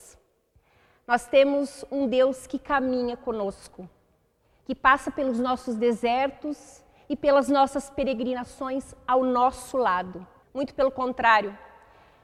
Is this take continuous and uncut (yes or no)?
no